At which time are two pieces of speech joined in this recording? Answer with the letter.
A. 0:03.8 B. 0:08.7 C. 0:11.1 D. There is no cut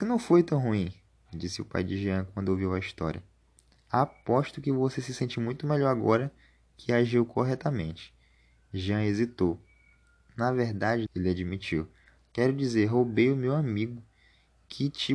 C